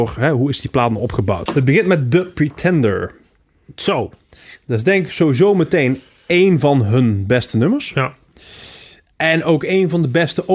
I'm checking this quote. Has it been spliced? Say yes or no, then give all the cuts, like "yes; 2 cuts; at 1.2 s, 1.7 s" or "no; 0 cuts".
yes; 1 cut; at 1.5 s